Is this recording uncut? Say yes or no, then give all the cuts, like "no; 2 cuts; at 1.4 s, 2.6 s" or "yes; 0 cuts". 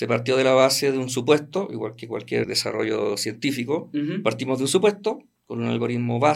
no; 1 cut; at 2.4 s